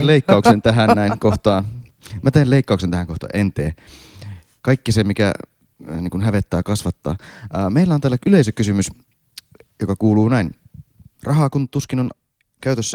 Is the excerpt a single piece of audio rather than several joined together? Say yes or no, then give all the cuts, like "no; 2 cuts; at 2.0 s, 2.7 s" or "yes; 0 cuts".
no; 1 cut; at 11.2 s